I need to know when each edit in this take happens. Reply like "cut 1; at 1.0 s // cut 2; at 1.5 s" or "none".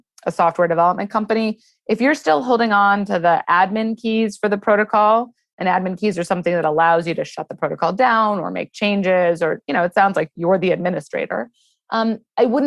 none